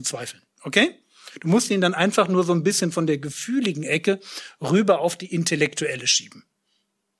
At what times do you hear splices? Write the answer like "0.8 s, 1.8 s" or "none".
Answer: none